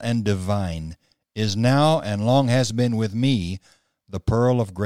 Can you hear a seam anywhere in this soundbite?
no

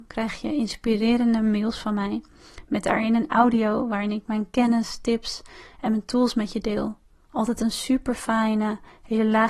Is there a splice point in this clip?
no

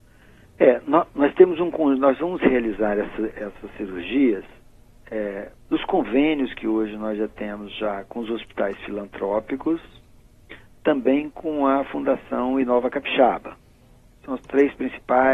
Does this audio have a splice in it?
yes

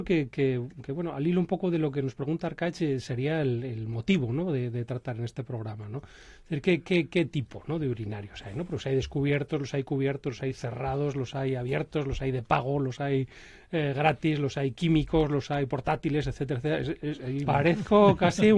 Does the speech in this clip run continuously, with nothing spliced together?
no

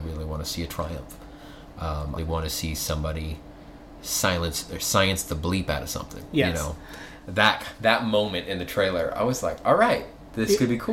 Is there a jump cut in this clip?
yes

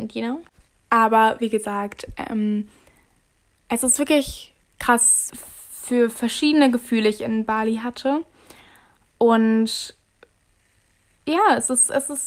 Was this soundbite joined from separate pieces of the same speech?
yes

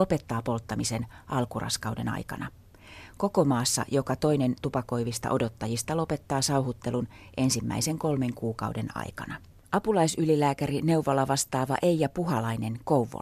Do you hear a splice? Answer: no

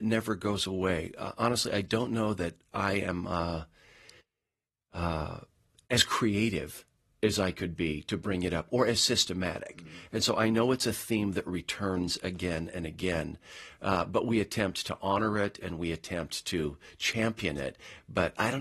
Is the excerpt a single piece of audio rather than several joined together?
yes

